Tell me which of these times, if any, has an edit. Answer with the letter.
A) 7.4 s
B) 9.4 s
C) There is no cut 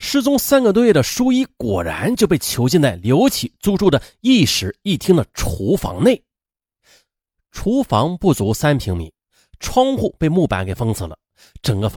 C